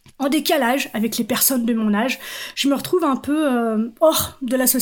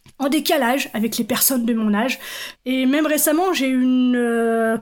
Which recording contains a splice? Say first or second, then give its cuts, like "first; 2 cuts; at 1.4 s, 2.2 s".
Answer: second; 1 cut; at 2.6 s